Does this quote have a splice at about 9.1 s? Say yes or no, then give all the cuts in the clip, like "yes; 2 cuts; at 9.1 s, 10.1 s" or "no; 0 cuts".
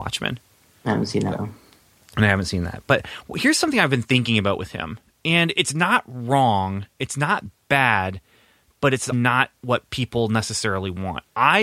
yes; 1 cut; at 9.1 s